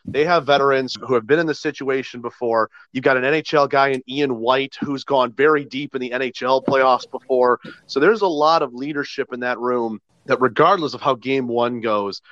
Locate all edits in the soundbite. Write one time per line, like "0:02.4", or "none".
0:02.8